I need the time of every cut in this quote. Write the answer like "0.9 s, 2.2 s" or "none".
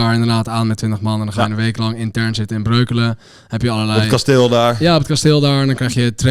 none